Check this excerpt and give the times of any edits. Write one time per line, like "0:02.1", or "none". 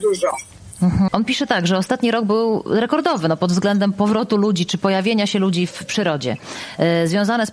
0:01.1